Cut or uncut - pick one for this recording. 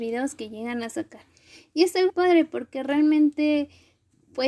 cut